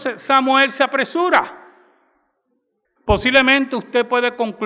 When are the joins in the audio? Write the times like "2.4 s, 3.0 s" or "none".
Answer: 3.0 s